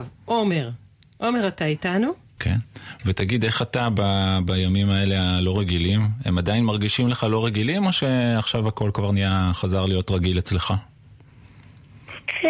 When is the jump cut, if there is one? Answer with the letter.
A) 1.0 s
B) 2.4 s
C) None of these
B